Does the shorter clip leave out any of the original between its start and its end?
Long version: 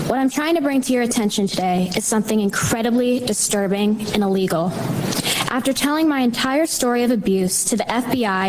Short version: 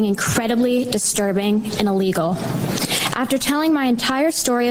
no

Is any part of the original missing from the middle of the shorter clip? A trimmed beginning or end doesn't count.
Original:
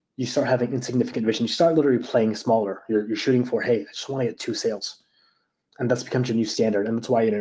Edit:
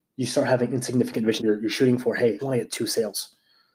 yes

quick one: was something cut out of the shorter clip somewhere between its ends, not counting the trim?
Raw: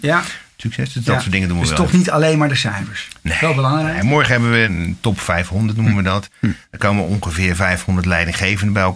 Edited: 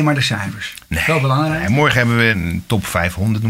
no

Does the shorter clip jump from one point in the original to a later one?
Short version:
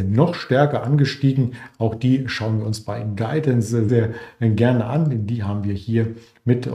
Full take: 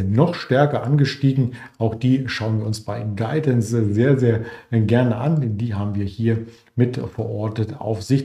yes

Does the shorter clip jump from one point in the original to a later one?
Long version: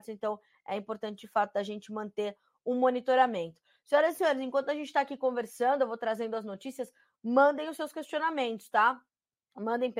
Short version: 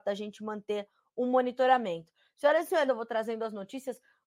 yes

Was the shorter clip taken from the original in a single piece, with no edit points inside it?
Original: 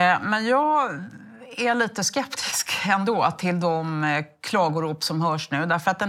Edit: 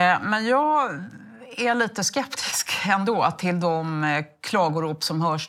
yes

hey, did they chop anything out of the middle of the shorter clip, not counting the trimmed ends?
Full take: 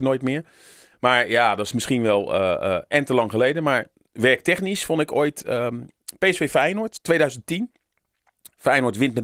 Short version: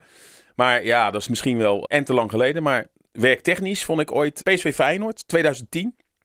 yes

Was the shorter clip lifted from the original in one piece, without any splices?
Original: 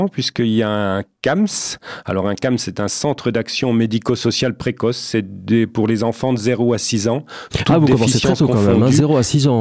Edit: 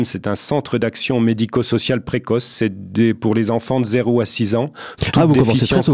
yes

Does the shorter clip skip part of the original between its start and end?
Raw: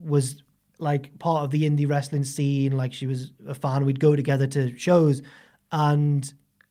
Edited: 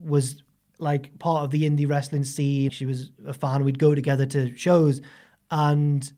yes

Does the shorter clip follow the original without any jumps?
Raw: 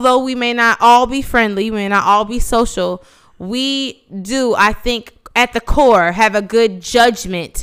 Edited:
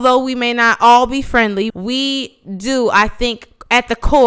no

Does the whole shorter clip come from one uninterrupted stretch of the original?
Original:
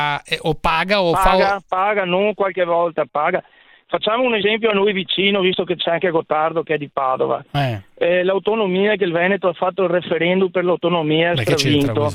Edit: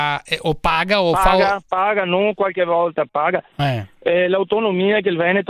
no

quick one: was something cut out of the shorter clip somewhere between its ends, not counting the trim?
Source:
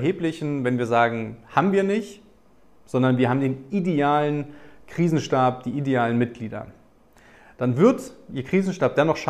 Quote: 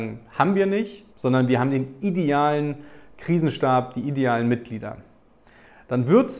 yes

